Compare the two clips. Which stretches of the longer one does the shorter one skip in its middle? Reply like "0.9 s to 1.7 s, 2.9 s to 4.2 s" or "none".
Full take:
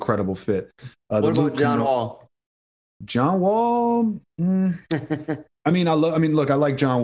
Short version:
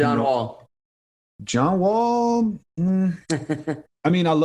none